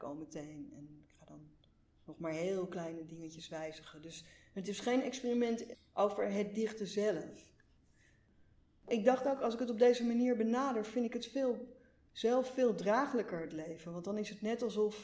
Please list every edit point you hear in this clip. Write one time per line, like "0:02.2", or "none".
none